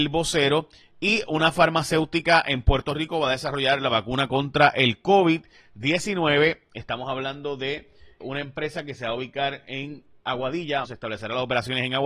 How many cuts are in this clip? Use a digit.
2